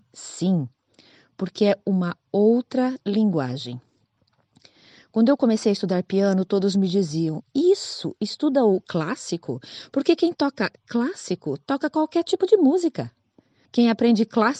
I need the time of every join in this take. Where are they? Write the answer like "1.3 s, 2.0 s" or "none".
13.6 s